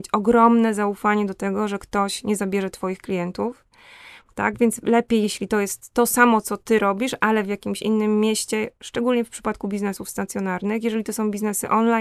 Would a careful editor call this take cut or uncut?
uncut